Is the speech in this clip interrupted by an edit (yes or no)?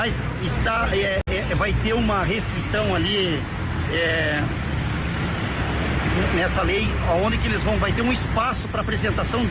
no